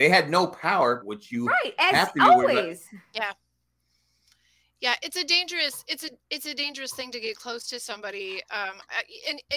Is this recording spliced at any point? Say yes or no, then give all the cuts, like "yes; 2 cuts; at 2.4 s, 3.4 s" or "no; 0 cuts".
yes; 1 cut; at 1.0 s